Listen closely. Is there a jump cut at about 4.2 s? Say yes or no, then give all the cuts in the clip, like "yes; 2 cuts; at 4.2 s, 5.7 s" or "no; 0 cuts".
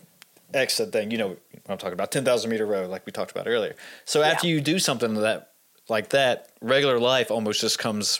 no; 0 cuts